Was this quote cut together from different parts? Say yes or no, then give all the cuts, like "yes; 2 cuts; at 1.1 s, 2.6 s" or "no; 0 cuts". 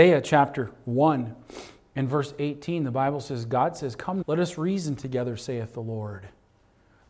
yes; 1 cut; at 4.2 s